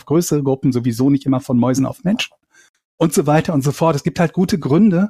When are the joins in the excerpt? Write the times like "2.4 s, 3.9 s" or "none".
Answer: none